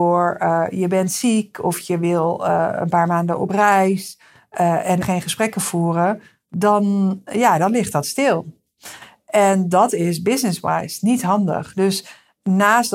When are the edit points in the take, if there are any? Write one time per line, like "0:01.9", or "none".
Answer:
0:05.0